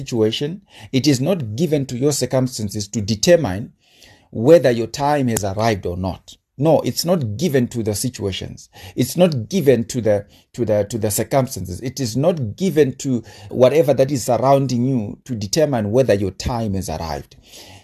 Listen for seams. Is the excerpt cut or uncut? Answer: cut